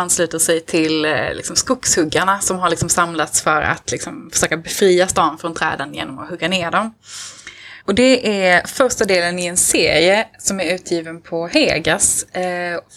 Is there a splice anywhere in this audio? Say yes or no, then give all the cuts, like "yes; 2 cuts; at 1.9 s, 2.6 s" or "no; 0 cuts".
yes; 1 cut; at 7.8 s